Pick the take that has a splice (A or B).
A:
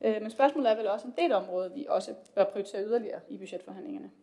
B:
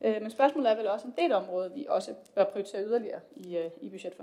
A